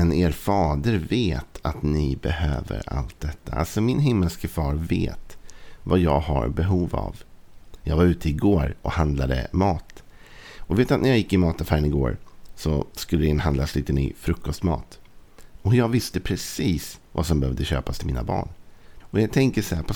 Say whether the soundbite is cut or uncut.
cut